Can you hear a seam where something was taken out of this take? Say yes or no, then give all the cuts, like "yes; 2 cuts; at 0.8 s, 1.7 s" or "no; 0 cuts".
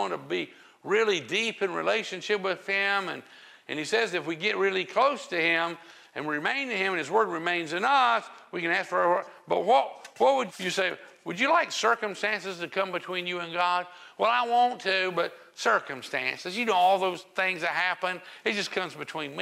yes; 1 cut; at 10.5 s